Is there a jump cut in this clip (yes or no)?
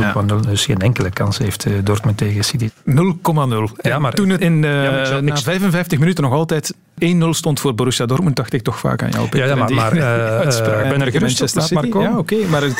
yes